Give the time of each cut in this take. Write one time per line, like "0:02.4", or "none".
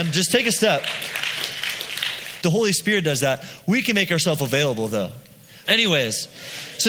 0:02.4
0:05.6